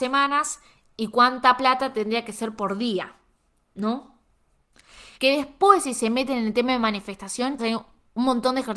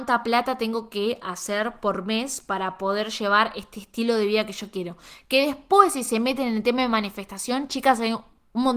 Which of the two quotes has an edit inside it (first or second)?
first